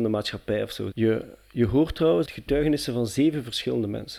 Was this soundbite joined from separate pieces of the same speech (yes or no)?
yes